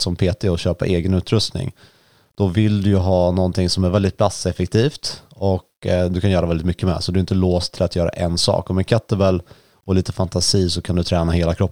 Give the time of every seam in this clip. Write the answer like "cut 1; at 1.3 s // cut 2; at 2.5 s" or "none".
none